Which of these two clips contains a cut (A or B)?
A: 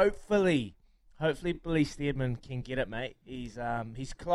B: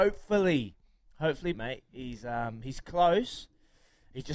B